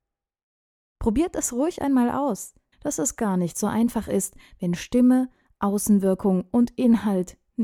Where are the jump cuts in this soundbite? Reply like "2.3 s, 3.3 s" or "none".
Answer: 2.7 s